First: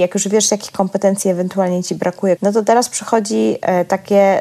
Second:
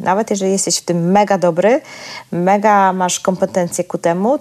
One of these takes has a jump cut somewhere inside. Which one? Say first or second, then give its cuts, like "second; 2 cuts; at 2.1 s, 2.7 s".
first; 1 cut; at 2.4 s